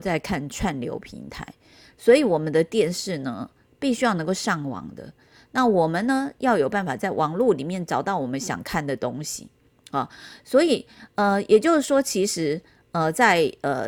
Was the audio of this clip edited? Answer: no; 0 cuts

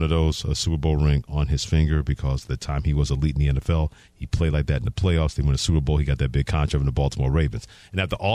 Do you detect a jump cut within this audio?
no; 0 cuts

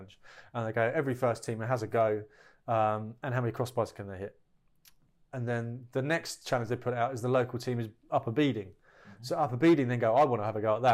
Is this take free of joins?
yes; 0 cuts

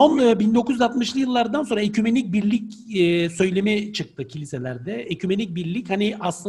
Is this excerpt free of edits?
yes; 0 cuts

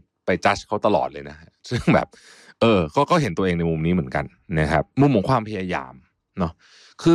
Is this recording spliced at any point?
no; 0 cuts

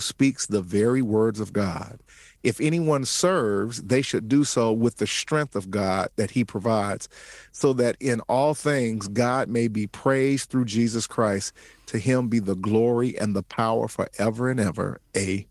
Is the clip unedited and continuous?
yes; 0 cuts

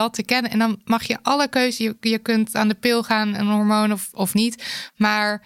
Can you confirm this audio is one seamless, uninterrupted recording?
yes; 0 cuts

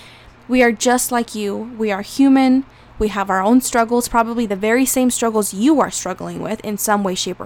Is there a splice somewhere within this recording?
no; 0 cuts

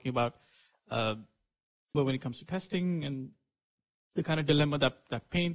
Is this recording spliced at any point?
yes; 1 cut; at 1.9 s

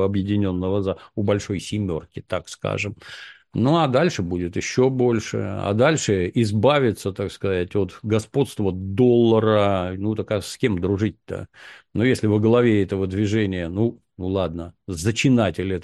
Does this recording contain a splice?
no; 0 cuts

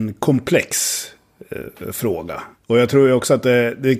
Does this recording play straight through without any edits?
no; 1 cut; at 2.6 s

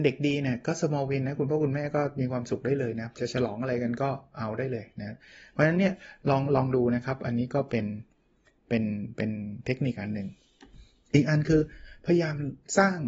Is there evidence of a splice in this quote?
no; 0 cuts

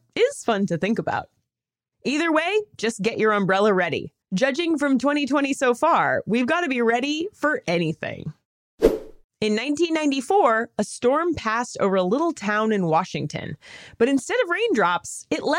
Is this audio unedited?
no; 2 cuts; at 4.2 s, 9.3 s

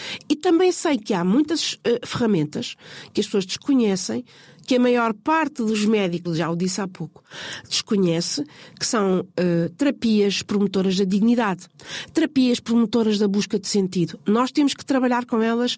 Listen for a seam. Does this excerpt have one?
yes; 1 cut; at 6.2 s

